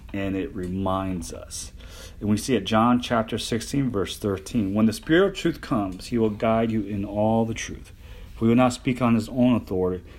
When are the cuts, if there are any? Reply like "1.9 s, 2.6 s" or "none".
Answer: none